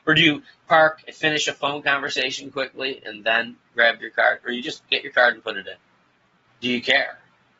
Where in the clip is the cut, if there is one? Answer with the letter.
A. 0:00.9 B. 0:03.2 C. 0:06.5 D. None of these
C